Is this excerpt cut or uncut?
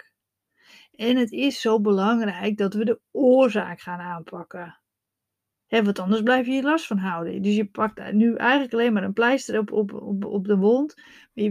uncut